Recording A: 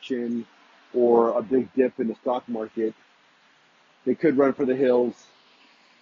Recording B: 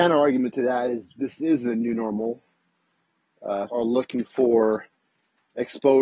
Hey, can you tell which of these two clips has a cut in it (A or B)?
B